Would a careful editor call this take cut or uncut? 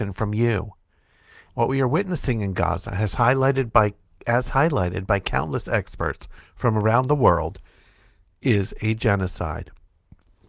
cut